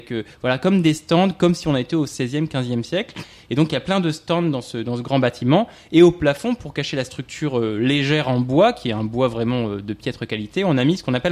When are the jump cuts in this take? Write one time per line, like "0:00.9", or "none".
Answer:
none